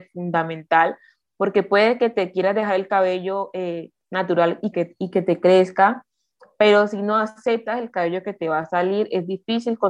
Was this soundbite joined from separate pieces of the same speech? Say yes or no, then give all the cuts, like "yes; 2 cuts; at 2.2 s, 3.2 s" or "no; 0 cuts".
yes; 1 cut; at 4.7 s